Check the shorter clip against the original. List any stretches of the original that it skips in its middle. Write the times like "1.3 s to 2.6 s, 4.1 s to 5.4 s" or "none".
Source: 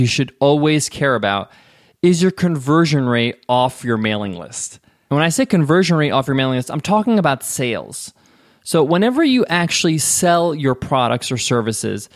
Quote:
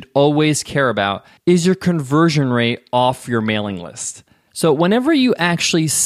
1.6 s to 1.9 s, 5.0 s to 8.6 s